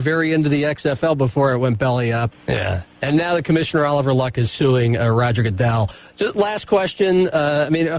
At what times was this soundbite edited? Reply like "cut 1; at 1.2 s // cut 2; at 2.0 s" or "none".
cut 1; at 2.3 s